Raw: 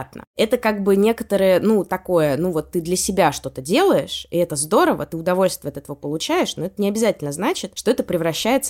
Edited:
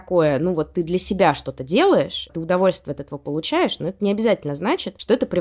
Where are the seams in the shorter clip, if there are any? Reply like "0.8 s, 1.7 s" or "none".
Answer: 2.3 s